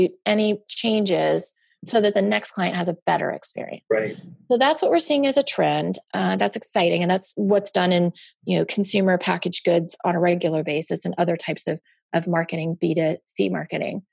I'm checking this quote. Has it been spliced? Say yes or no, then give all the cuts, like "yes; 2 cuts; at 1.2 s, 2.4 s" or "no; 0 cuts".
no; 0 cuts